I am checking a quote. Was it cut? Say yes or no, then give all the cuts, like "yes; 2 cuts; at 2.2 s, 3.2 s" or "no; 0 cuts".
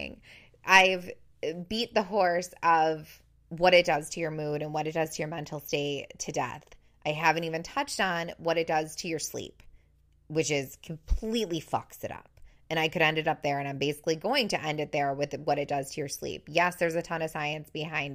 no; 0 cuts